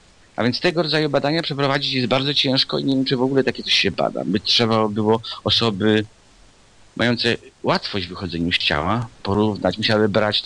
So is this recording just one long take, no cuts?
yes; 0 cuts

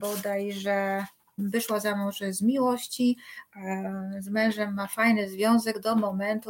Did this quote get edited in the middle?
yes; 1 cut; at 1.4 s

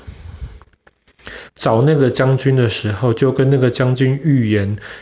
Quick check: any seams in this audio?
yes; 1 cut; at 1.5 s

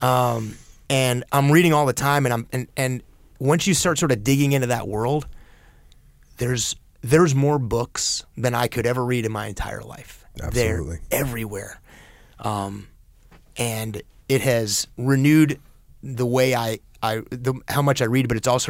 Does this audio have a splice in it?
no; 0 cuts

